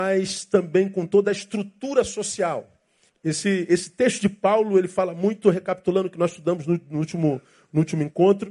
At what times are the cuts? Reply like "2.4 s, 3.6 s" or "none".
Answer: 3.1 s